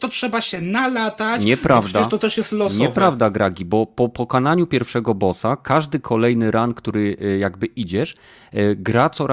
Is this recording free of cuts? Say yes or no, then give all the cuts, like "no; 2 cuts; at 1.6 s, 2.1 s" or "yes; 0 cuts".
yes; 0 cuts